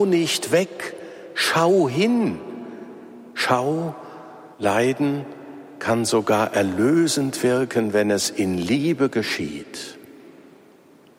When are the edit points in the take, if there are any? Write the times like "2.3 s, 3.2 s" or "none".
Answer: 4.5 s